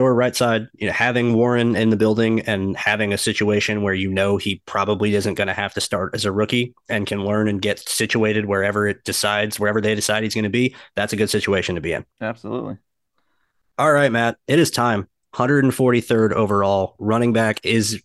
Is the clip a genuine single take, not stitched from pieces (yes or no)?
no